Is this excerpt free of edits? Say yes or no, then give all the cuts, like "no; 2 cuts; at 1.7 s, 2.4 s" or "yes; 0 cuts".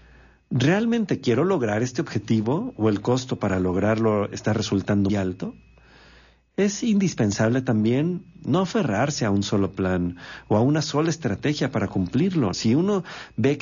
no; 2 cuts; at 5.1 s, 12.5 s